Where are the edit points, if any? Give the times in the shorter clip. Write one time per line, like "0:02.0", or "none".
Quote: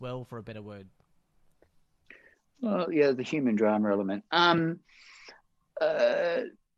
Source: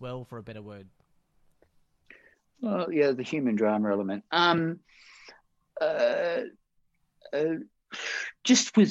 none